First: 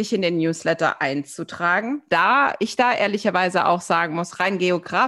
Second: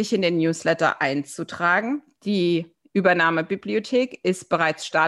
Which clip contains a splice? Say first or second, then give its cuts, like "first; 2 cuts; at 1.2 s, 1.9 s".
first; 1 cut; at 2.1 s